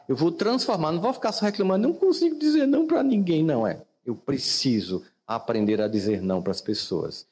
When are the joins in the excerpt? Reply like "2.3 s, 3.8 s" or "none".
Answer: none